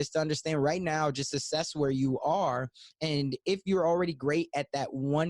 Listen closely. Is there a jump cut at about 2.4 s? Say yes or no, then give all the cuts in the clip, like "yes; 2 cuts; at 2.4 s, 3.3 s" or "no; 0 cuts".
no; 0 cuts